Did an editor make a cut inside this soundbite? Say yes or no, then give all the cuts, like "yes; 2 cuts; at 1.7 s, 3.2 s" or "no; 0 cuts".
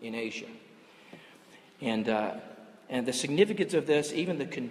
no; 0 cuts